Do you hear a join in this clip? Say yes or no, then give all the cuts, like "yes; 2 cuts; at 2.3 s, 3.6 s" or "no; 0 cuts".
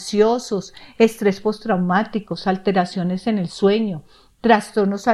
no; 0 cuts